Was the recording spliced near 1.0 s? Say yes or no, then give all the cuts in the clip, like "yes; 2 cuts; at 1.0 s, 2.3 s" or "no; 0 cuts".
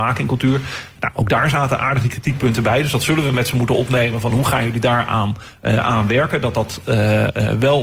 yes; 1 cut; at 1.0 s